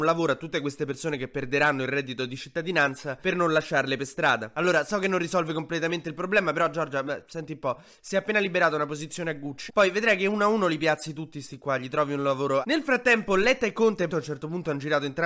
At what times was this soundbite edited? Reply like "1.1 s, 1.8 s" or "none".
9.7 s, 12.6 s, 14.1 s